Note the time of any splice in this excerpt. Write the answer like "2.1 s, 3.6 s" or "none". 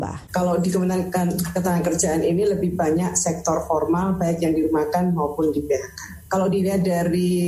none